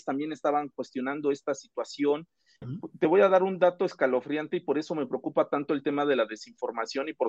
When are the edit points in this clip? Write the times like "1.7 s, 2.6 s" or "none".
2.6 s